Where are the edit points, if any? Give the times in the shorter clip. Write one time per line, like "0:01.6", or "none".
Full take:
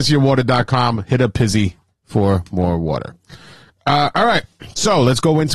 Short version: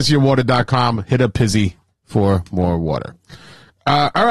none